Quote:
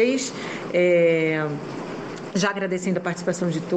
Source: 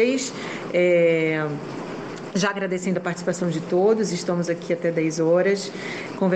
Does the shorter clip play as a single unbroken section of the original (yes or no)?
yes